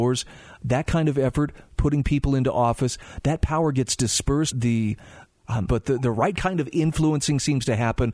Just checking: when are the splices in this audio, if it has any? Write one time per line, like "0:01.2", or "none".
0:04.5
0:05.7